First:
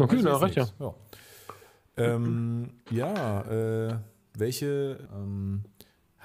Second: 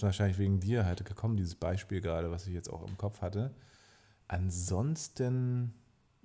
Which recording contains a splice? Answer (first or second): first